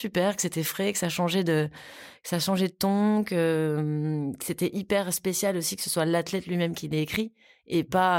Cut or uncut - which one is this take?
uncut